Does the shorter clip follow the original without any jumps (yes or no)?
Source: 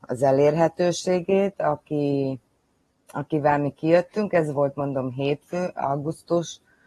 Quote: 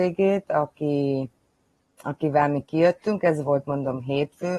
yes